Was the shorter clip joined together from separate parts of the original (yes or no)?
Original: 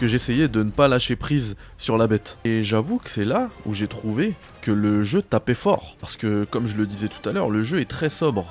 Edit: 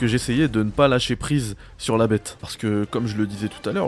yes